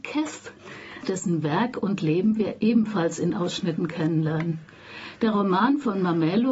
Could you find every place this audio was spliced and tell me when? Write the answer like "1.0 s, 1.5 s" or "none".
1.0 s